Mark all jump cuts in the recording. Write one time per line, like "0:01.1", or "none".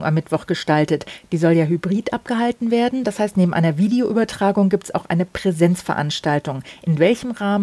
none